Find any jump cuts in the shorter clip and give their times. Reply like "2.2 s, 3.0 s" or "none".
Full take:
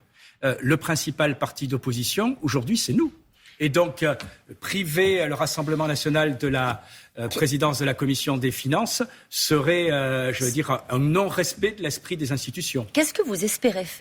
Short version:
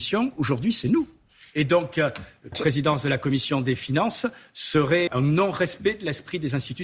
2.5 s, 5.1 s